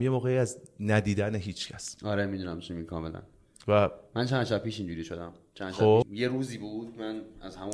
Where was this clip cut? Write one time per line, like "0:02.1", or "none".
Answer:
0:06.0